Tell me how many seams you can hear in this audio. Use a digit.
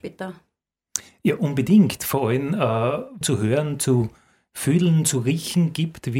1